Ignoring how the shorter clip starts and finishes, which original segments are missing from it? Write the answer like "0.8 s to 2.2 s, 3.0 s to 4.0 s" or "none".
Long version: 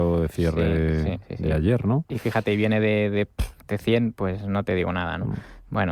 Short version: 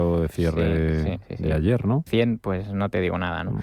2.1 s to 3.8 s

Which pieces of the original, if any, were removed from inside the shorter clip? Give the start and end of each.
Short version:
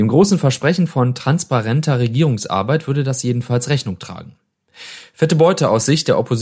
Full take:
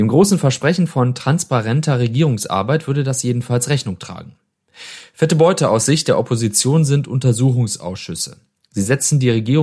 none

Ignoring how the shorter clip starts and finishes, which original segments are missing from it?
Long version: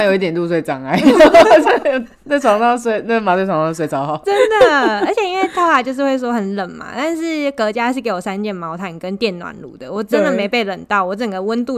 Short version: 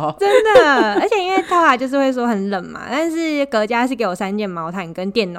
none

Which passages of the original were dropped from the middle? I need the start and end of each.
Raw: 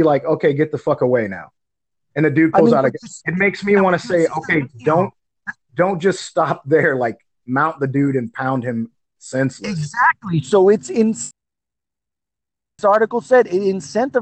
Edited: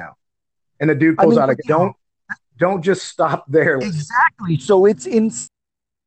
3.0 s to 4.8 s, 7.0 s to 9.6 s

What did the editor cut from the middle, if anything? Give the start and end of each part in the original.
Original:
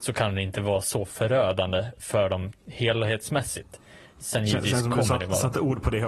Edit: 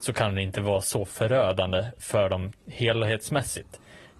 none

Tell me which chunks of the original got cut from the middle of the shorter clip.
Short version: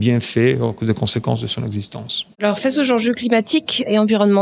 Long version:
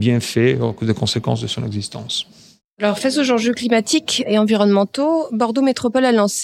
2.3 s to 2.7 s

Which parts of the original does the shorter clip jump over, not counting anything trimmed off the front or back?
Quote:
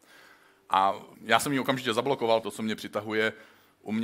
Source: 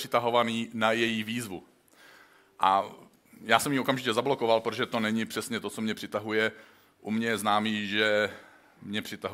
3.0 s to 3.3 s, 4.6 s to 5.6 s

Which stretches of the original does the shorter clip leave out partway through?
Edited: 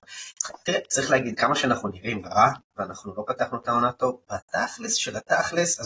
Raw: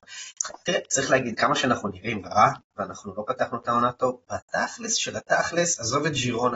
none

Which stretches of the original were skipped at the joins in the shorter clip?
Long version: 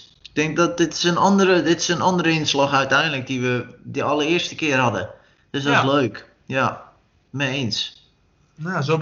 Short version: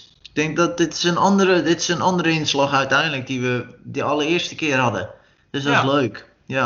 none

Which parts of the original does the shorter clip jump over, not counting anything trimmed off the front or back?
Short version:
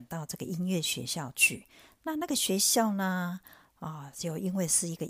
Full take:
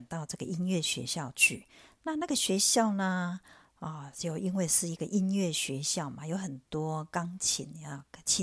none

